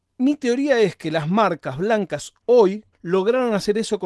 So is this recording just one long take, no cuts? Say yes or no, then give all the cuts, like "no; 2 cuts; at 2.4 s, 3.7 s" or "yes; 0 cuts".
no; 1 cut; at 2.9 s